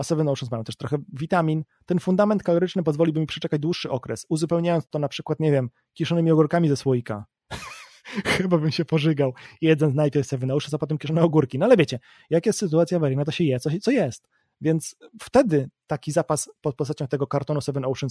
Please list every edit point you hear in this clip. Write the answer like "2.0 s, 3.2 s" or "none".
none